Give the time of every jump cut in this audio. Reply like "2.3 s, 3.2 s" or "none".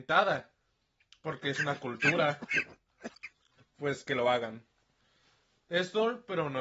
3.6 s